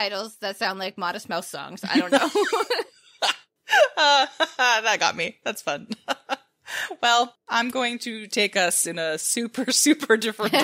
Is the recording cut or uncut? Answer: uncut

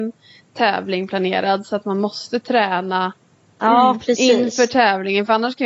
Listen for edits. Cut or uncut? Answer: uncut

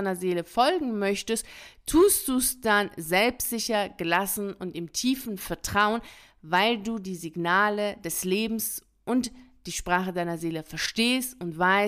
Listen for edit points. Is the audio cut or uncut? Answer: uncut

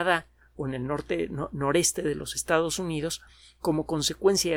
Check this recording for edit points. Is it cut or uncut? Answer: uncut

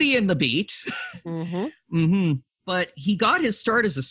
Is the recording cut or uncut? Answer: uncut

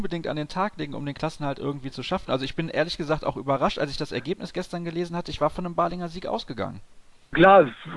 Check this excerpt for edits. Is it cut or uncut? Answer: uncut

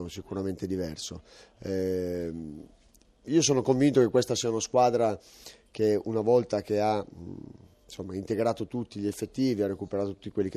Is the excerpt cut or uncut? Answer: uncut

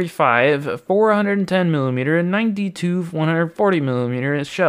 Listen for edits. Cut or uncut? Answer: uncut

